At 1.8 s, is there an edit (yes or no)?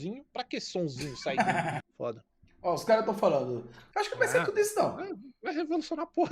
yes